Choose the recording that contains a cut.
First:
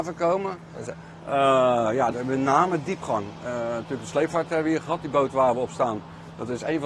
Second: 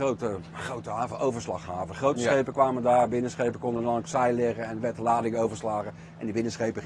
first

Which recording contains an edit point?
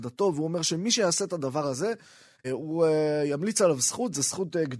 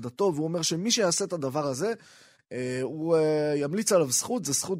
first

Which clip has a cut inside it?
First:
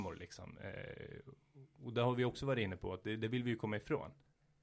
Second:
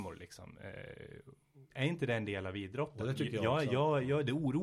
second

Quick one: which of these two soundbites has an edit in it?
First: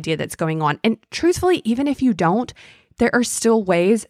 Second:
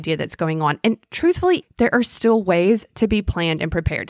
second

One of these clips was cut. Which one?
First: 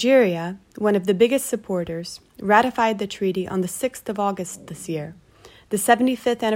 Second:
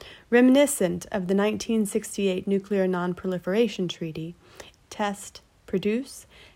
second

